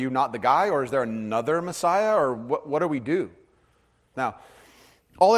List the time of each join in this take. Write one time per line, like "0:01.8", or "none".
0:04.1